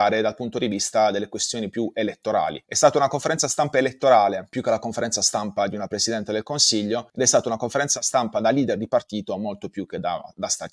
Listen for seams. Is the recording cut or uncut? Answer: uncut